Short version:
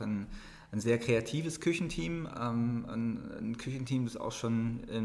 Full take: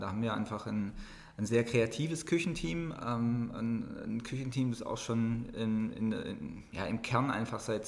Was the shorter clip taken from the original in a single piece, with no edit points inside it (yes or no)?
yes